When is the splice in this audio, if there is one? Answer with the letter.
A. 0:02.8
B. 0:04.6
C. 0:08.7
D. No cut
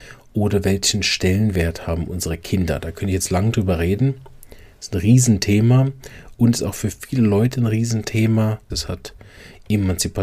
C